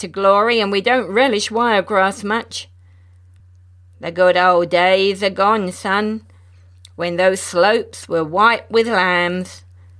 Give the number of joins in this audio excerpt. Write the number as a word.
zero